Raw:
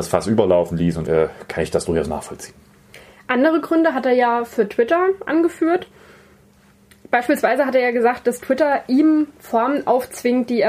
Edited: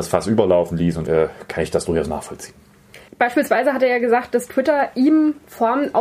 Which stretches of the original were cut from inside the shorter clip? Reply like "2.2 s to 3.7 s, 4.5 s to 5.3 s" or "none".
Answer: 3.1 s to 7.0 s